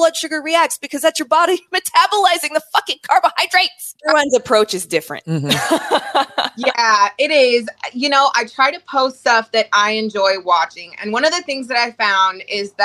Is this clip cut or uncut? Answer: cut